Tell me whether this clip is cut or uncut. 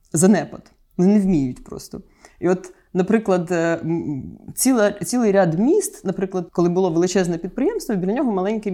cut